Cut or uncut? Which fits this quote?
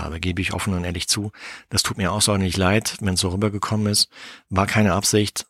uncut